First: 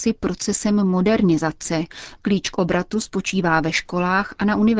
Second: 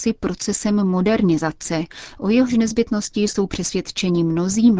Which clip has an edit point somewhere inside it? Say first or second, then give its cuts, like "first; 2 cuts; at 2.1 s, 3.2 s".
first; 1 cut; at 2.2 s